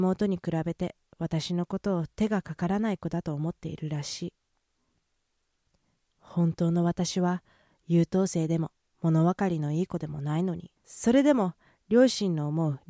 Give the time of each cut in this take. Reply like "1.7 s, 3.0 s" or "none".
10.8 s